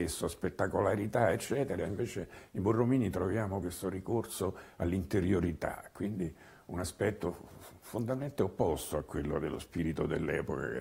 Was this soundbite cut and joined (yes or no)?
yes